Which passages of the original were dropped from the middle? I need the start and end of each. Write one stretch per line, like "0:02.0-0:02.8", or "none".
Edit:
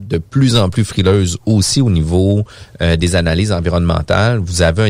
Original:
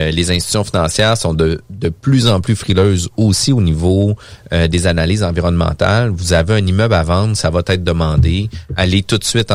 none

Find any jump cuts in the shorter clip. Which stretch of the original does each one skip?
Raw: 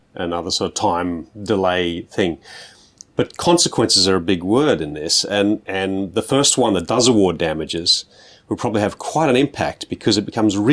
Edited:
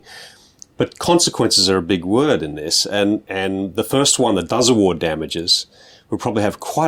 none

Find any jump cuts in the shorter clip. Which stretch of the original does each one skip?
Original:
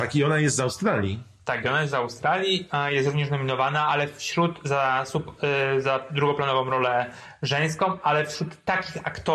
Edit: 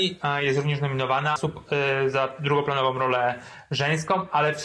0:03.9-0:05.1

